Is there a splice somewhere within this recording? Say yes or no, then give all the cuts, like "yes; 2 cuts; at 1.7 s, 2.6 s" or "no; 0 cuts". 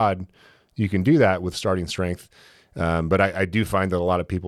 no; 0 cuts